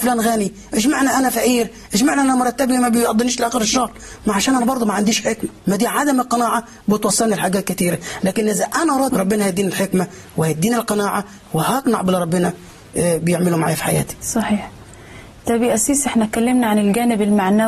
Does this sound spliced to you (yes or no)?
yes